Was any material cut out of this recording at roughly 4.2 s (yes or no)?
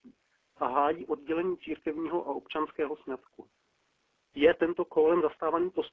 yes